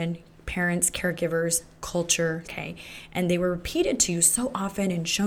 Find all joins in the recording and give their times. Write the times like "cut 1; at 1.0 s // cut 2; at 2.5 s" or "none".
cut 1; at 2.4 s